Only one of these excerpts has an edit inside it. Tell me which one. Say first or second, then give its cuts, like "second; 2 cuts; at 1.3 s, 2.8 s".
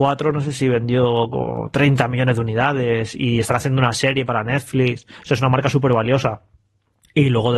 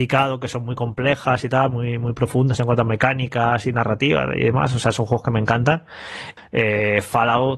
second; 1 cut; at 6.4 s